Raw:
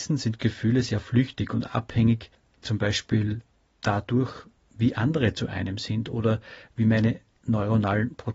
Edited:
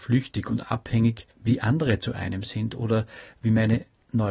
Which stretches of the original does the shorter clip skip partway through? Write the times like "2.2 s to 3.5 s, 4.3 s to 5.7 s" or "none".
2.4 s to 4.7 s